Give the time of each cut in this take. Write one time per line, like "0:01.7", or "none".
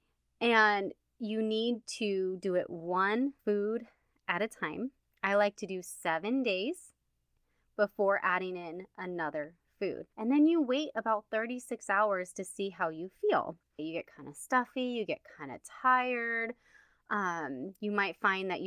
0:03.4
0:10.1
0:13.8